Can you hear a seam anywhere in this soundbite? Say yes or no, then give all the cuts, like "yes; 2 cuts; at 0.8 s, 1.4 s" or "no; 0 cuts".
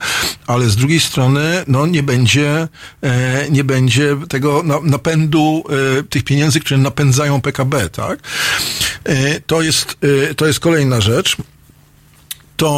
no; 0 cuts